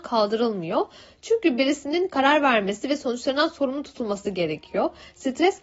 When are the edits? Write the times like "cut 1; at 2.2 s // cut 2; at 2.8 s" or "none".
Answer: none